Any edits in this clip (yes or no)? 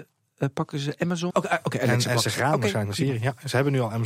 yes